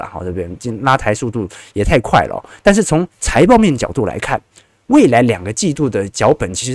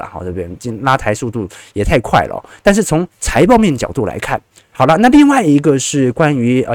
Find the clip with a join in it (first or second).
second